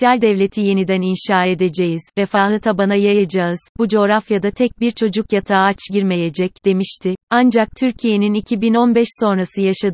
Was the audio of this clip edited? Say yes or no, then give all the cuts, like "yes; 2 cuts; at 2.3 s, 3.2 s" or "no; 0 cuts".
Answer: yes; 1 cut; at 7.2 s